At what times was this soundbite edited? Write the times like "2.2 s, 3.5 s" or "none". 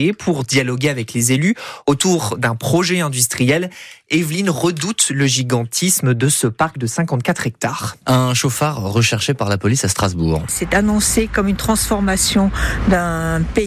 8.0 s, 10.5 s